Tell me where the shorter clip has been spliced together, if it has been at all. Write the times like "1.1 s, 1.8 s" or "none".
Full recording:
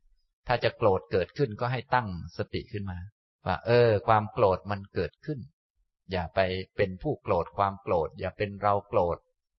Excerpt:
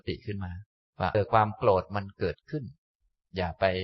1.1 s